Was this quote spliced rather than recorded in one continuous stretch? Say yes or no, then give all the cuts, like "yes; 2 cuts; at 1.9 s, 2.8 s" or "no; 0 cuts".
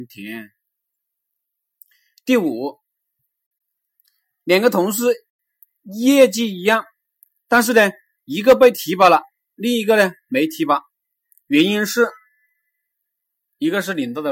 no; 0 cuts